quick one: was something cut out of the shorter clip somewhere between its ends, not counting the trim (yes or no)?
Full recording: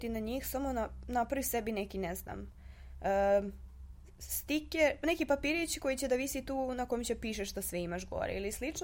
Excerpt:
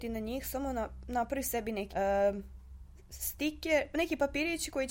yes